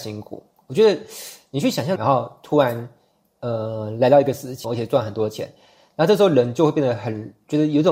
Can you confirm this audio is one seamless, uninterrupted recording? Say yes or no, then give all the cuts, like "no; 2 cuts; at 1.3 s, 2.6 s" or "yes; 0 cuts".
no; 2 cuts; at 2.0 s, 4.6 s